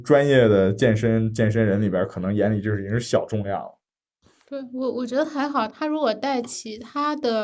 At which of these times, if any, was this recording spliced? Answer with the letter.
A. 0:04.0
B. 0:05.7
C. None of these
C